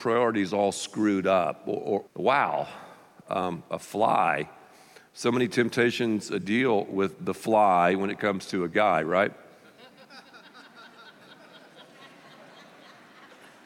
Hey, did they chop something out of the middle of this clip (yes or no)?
yes